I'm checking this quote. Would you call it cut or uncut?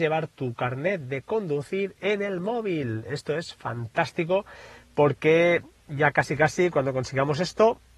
uncut